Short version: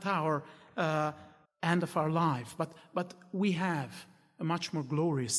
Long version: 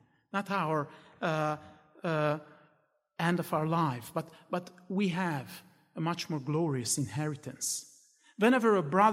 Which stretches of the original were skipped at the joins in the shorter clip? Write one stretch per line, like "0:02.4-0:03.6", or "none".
0:01.9-0:03.0

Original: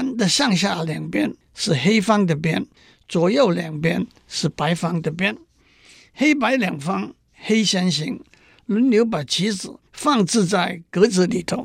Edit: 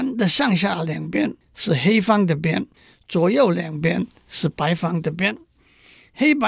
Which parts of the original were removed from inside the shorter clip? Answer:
none

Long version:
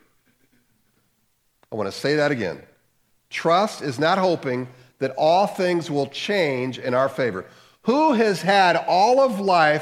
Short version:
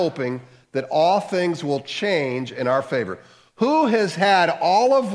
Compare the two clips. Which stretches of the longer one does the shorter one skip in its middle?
none

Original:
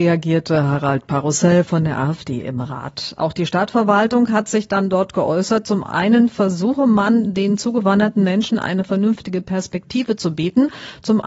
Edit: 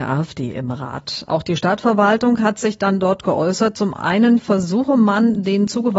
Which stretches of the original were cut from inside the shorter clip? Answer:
none

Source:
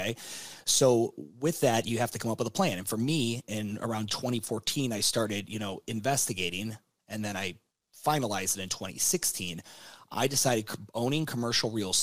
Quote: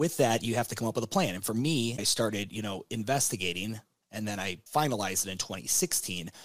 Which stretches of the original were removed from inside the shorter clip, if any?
0:03.4-0:05.0
0:07.6-0:08.0

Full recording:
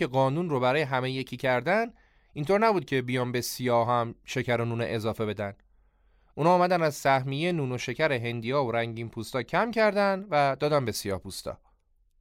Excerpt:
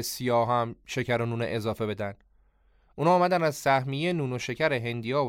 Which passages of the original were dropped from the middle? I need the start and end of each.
none

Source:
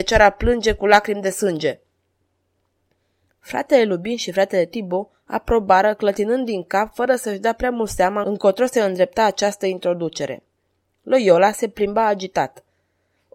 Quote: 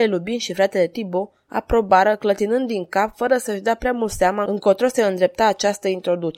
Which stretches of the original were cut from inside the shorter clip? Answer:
none

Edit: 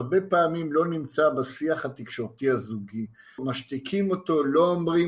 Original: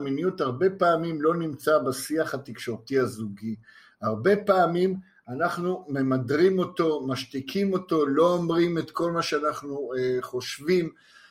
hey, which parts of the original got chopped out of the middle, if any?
0:03.9-0:07.0

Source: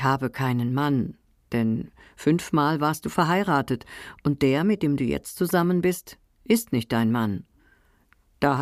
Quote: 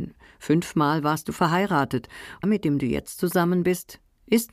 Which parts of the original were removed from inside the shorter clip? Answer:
0:04.2-0:04.6

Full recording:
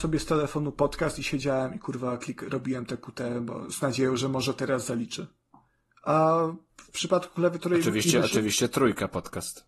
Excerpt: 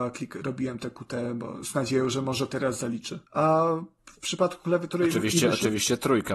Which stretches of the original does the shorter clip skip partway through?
0:05.3-0:06.0

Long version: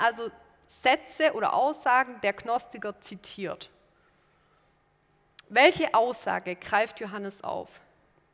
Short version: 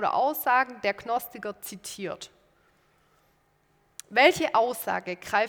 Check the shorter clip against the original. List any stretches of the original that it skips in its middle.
none

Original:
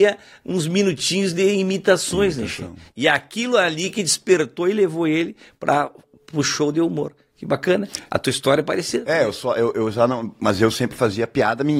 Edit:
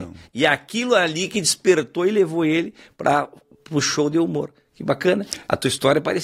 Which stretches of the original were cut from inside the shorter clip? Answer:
none

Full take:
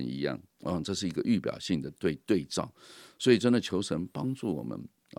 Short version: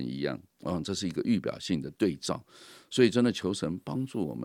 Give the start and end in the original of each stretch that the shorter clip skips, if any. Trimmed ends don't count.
0:01.9-0:02.2

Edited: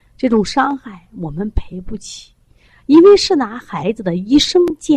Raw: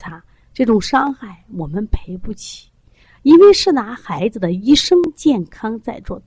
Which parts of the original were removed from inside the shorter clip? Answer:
none

